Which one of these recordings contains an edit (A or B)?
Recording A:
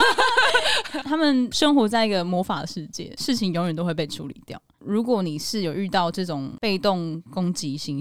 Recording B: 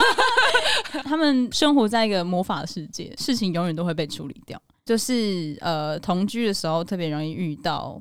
A